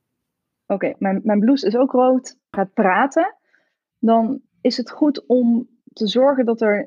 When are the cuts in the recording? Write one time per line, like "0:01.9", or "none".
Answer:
0:02.5
0:04.5